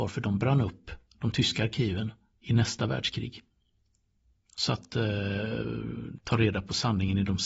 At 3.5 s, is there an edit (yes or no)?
no